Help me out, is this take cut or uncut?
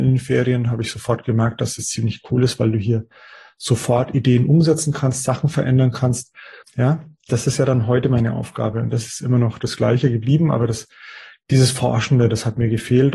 cut